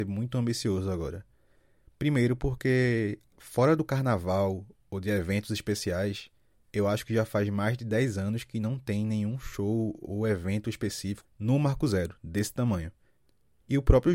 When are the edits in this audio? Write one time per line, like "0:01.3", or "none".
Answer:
0:11.2